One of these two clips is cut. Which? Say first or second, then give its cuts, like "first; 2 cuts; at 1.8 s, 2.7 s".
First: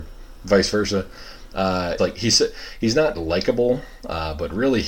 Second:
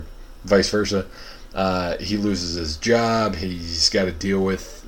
first; 2 cuts; at 2.0 s, 3.1 s